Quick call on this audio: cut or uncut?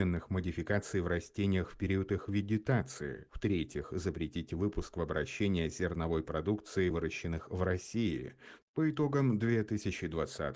cut